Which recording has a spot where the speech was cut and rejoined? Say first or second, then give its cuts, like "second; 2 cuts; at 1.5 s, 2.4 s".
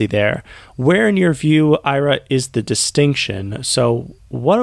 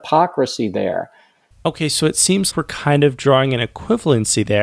second; 2 cuts; at 1.5 s, 2.5 s